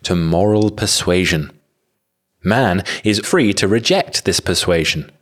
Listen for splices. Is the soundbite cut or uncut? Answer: cut